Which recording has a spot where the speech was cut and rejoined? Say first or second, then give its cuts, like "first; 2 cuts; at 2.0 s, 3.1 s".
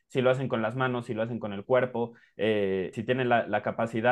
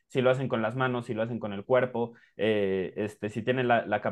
first; 1 cut; at 2.9 s